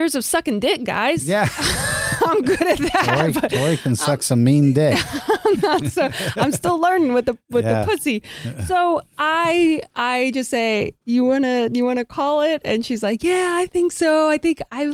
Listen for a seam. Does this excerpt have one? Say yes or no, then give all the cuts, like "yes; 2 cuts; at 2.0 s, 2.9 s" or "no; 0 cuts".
no; 0 cuts